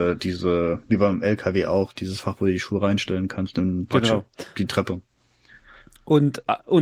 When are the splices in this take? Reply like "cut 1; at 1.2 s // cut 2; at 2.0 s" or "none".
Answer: none